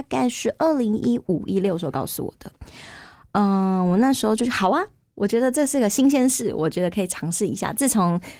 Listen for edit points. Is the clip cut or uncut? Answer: uncut